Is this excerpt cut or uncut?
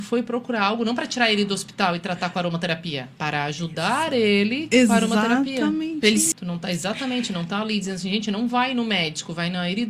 cut